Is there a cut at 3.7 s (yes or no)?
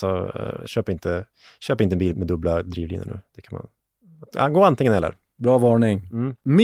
no